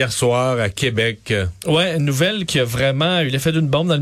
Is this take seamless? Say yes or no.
yes